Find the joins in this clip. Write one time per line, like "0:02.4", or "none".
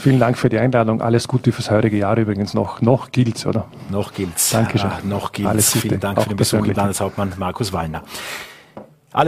0:06.7